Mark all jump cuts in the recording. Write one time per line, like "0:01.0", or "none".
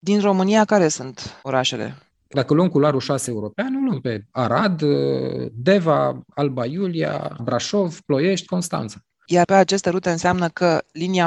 0:07.4
0:08.5